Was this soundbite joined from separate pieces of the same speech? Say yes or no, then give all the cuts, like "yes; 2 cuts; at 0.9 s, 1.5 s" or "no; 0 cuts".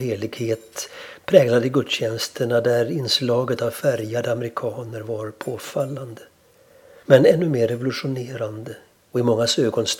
yes; 1 cut; at 7.0 s